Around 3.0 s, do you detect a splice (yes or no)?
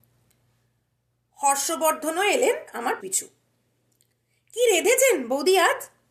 yes